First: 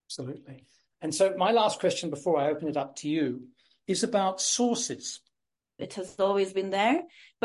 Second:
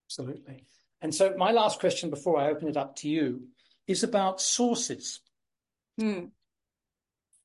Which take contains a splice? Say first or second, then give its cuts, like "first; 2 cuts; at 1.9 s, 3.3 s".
first; 1 cut; at 5.8 s